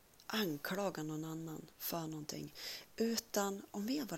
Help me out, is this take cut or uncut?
uncut